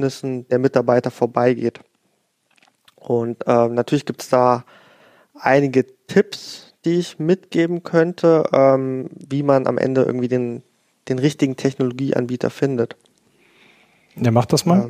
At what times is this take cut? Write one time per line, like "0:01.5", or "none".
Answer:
none